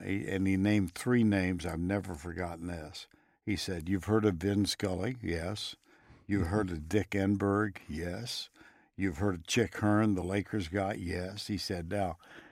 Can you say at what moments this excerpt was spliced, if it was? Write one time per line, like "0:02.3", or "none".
none